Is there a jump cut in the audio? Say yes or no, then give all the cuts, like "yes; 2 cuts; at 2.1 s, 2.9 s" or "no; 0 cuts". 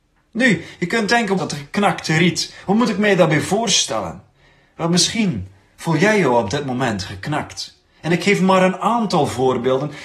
yes; 1 cut; at 1.4 s